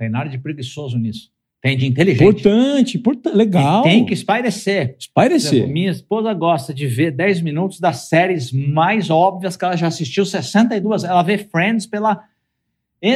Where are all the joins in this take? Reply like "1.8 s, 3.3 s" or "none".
none